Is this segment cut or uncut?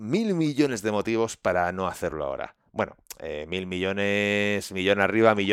uncut